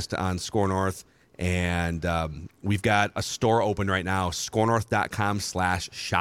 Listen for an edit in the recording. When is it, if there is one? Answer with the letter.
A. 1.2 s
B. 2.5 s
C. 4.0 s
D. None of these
D